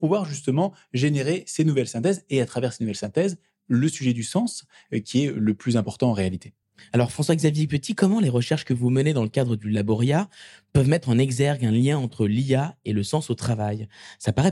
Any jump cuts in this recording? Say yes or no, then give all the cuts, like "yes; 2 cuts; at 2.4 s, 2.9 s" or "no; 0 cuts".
no; 0 cuts